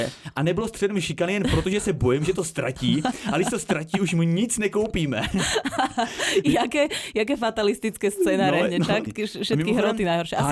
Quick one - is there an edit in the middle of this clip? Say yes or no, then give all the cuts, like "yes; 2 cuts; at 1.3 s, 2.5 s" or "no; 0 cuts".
yes; 1 cut; at 9.1 s